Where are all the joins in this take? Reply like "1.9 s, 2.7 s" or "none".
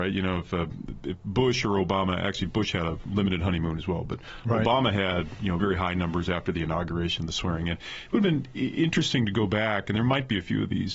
5.6 s

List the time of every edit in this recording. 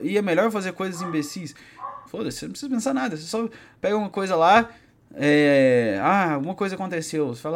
2.1 s

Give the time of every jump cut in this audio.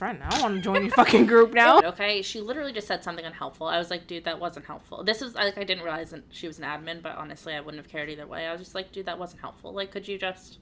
1.8 s

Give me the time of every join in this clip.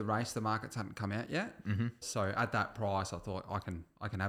2.0 s

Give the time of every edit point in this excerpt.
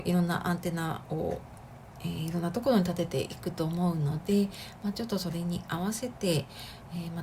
none

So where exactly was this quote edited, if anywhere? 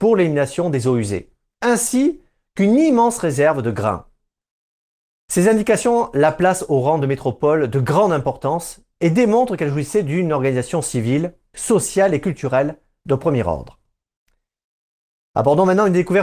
11.5 s

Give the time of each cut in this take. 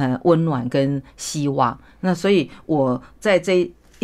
none

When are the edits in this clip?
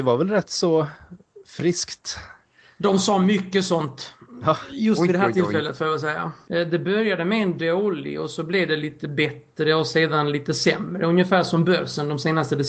6.4 s

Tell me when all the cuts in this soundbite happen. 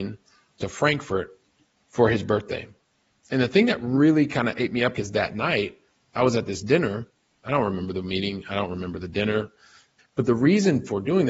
4.9 s, 10.0 s

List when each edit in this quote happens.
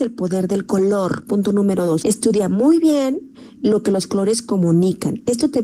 2.0 s

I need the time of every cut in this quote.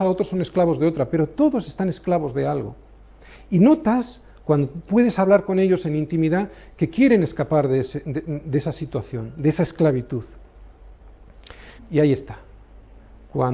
4.9 s, 11.8 s

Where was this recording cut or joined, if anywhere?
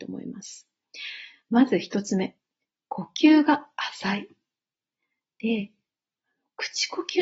none

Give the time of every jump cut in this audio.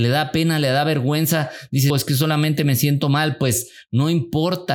1.9 s

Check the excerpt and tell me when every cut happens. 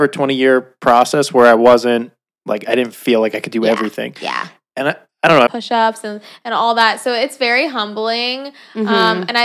5.5 s

